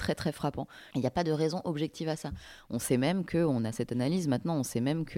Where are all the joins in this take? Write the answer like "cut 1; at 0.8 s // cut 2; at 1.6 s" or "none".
cut 1; at 0.9 s